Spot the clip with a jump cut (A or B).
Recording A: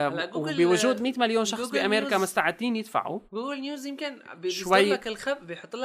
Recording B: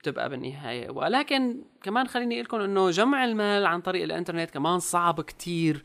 A